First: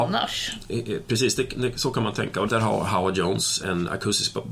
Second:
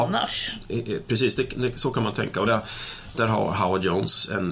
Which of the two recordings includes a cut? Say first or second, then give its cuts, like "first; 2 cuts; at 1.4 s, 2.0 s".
first; 2 cuts; at 2.5 s, 3.6 s